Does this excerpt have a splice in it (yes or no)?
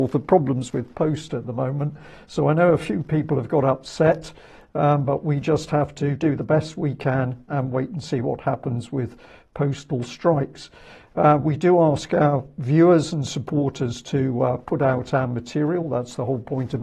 no